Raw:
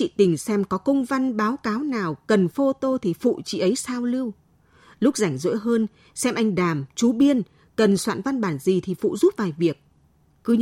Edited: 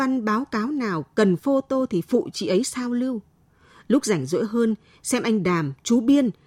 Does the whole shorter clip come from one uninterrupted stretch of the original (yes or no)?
yes